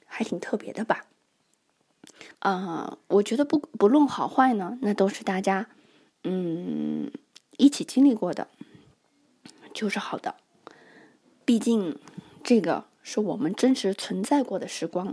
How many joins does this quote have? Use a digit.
1